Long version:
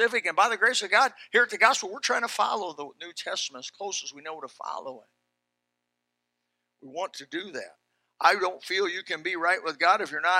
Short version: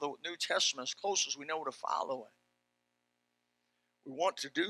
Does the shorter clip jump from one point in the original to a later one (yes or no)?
no